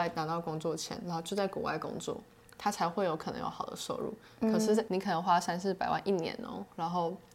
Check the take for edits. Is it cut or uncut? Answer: uncut